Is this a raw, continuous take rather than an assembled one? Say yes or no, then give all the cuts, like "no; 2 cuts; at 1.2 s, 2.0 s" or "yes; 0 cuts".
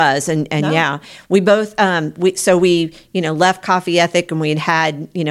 yes; 0 cuts